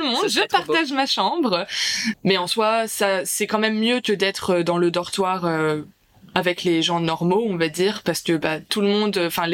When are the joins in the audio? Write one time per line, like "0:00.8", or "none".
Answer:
0:02.1